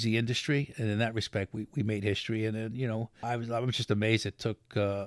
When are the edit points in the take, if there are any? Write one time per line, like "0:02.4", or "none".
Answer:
0:03.2